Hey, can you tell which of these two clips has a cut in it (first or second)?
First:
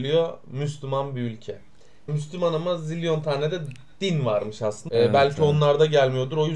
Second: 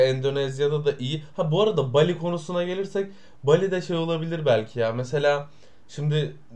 first